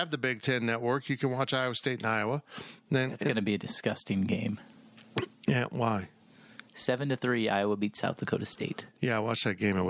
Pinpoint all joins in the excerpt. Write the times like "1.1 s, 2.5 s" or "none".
none